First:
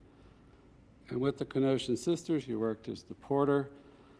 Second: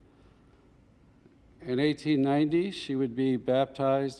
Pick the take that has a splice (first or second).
first